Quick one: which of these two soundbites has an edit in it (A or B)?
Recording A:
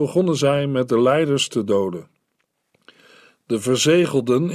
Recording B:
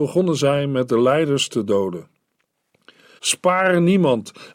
B